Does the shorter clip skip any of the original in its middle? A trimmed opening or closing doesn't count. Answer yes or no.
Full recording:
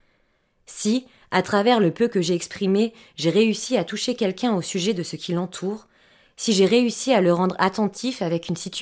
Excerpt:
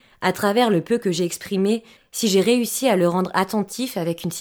yes